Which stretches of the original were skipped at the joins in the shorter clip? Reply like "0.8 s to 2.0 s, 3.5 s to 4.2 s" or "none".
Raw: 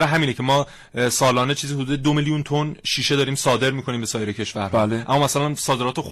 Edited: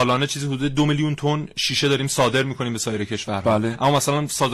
none